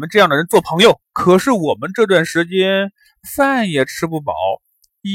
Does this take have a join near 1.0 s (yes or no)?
yes